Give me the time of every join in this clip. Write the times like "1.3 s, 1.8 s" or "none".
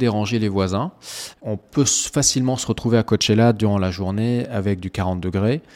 1.3 s